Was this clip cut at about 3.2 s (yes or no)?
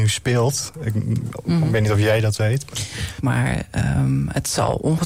yes